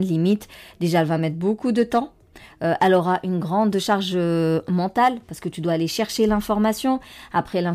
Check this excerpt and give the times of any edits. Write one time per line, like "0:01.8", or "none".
none